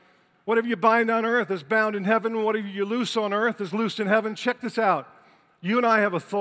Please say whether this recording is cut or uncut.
uncut